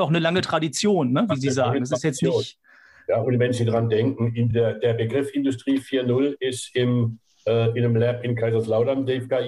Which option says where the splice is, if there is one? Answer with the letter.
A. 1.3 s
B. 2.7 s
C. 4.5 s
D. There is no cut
D